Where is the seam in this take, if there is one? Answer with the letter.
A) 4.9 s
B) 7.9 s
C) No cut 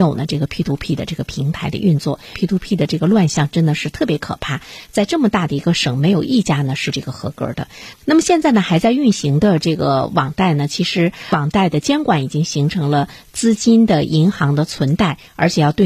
B